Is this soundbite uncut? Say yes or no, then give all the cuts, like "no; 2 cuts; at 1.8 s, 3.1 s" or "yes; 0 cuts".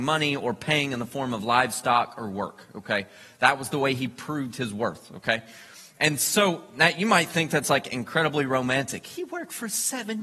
yes; 0 cuts